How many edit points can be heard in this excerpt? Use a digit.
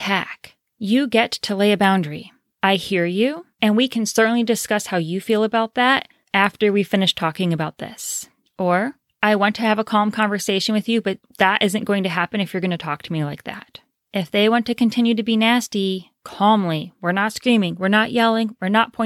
0